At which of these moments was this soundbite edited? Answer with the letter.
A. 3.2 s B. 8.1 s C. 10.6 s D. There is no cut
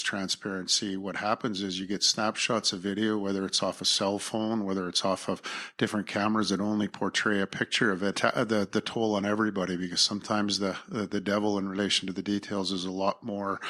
B